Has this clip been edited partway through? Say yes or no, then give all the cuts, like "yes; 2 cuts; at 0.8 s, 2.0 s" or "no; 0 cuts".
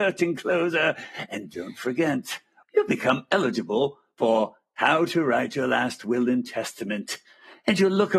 yes; 1 cut; at 2.6 s